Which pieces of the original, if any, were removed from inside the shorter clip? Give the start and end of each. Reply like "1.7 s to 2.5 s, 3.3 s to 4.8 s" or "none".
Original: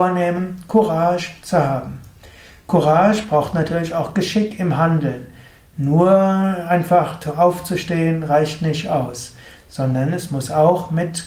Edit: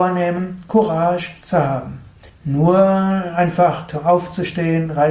2.3 s to 5.6 s